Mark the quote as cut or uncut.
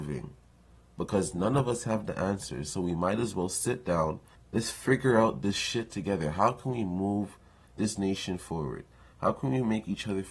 cut